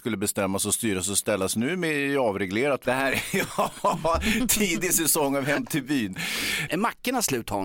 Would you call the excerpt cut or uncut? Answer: cut